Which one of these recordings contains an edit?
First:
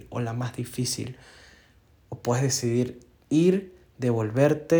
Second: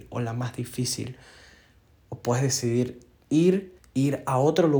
second; 1 cut; at 3.8 s

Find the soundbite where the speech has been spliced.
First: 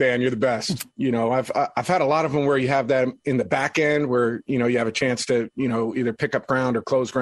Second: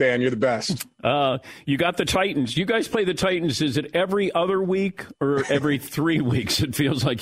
first; 1 cut; at 0.9 s

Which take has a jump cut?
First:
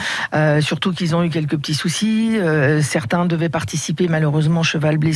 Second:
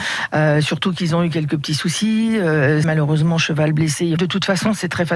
second; 2 cuts; at 2.8 s, 4.2 s

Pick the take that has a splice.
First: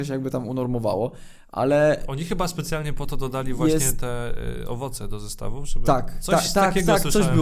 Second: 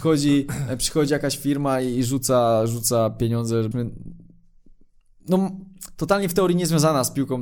second; 1 cut; at 3.7 s

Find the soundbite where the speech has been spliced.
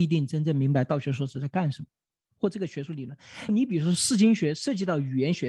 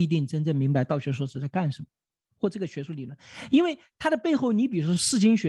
first; 1 cut; at 3.5 s

